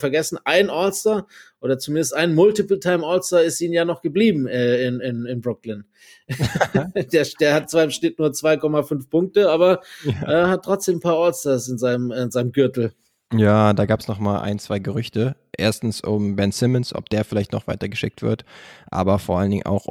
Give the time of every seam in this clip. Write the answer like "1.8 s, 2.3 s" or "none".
none